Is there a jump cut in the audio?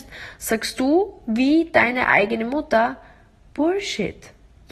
no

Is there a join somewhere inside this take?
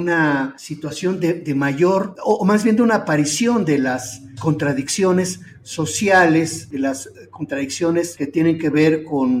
no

